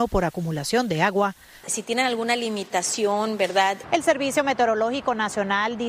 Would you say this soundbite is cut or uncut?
cut